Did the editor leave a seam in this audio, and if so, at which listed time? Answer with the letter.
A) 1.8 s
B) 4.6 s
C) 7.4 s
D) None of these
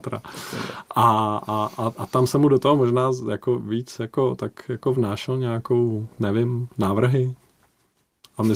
D